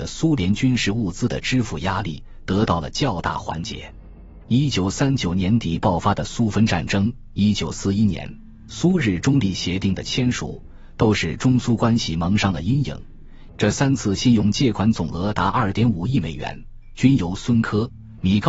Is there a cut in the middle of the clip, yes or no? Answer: yes